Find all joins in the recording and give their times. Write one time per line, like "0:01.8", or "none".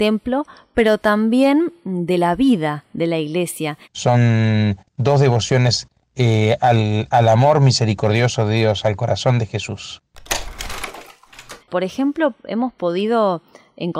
0:03.8
0:11.6